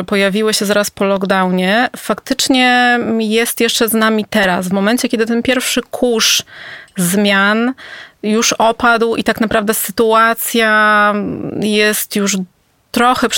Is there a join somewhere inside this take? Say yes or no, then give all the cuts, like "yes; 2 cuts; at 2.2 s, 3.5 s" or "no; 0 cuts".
no; 0 cuts